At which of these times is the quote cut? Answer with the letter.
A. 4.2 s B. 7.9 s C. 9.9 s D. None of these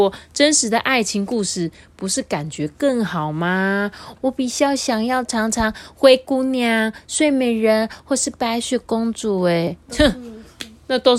A